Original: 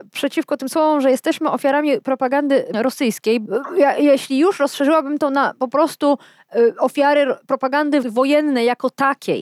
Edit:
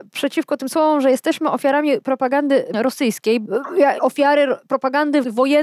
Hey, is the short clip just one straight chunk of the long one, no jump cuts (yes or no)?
no